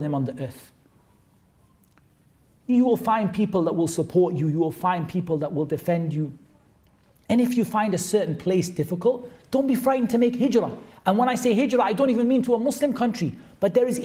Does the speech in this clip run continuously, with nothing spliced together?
yes; 0 cuts

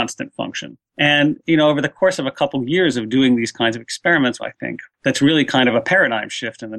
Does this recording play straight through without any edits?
no; 1 cut; at 4.4 s

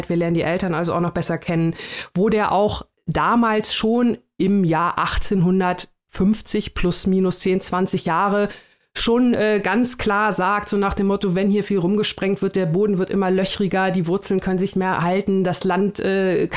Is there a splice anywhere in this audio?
no; 0 cuts

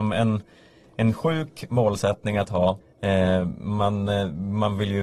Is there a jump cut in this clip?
yes; 1 cut; at 2.8 s

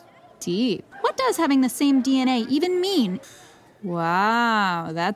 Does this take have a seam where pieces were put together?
yes; 2 cuts; at 0.9 s, 3.2 s

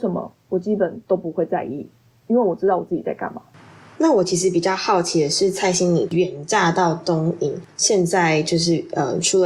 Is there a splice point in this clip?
no; 0 cuts

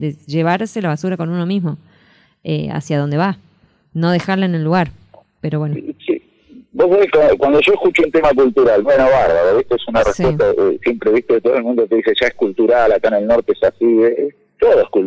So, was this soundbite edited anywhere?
no; 0 cuts

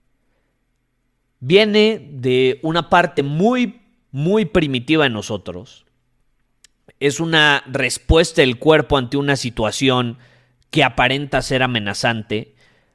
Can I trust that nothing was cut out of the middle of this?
yes; 0 cuts

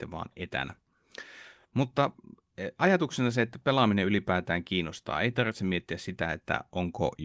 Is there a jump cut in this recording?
no; 0 cuts

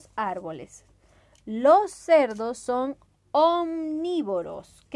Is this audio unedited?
yes; 0 cuts

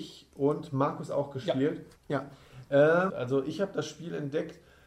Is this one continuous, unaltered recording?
no; 2 cuts; at 2.0 s, 3.1 s

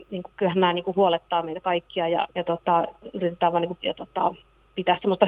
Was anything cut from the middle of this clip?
yes; 2 cuts; at 2.3 s, 3.8 s

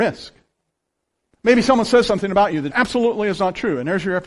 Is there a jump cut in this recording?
yes; 1 cut; at 2.7 s

